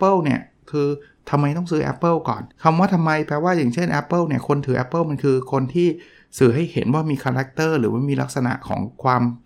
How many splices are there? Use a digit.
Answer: 1